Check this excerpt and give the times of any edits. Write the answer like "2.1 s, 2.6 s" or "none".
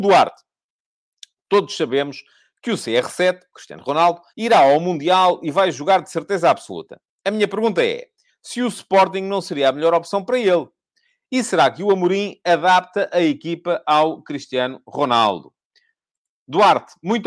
4.3 s